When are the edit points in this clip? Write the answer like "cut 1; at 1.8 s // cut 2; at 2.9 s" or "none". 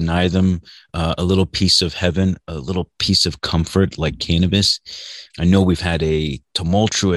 cut 1; at 5.3 s